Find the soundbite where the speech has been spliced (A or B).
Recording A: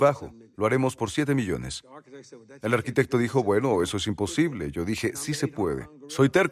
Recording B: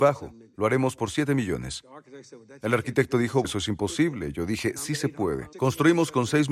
B